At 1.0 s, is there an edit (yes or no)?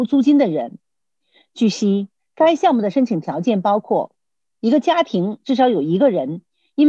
no